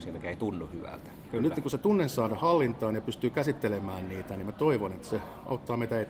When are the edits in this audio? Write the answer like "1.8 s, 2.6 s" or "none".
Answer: 1.3 s